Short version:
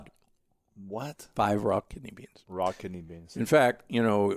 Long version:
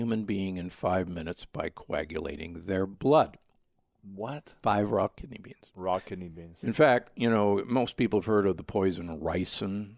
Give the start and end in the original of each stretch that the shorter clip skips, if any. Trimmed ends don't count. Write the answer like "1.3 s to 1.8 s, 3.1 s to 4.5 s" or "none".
none